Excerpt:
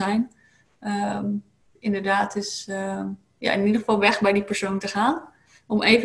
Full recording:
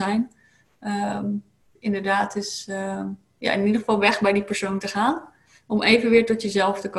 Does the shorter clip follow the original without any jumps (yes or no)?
yes